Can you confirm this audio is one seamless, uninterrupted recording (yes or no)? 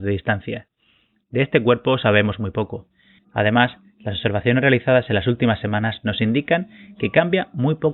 no